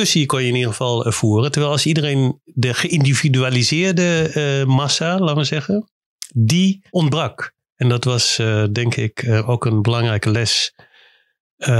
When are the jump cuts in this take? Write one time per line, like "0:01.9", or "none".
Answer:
0:06.9